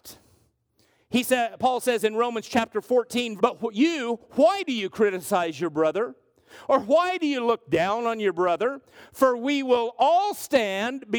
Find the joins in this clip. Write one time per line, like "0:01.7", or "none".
0:03.4